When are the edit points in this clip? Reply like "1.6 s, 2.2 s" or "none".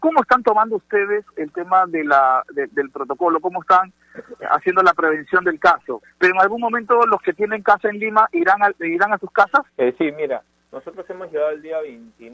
6.0 s, 9.7 s